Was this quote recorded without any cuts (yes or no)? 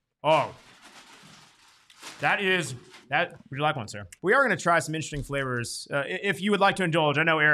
no